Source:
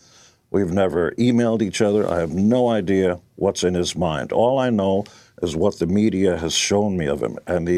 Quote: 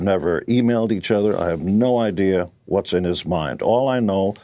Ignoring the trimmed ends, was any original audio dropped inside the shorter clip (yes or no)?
no